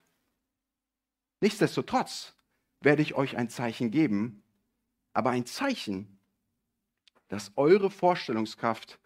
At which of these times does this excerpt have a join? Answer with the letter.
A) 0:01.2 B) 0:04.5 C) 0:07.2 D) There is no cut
D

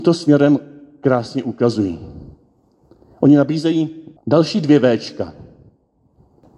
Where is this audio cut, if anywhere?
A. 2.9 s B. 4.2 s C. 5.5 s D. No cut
B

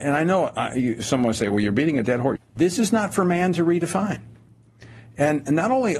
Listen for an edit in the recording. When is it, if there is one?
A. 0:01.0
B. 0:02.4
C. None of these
B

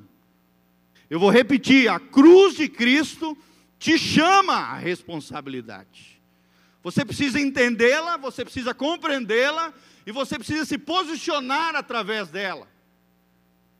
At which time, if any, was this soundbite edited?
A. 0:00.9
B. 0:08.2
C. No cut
A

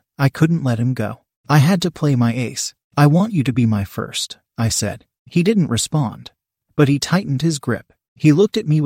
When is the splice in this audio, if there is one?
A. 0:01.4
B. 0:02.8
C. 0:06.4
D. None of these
D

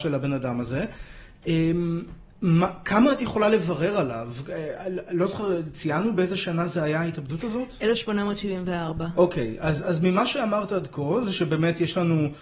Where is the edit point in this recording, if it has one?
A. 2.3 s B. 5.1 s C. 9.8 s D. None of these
C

